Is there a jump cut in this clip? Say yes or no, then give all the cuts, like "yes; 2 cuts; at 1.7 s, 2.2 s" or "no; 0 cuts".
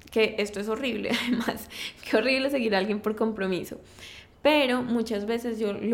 no; 0 cuts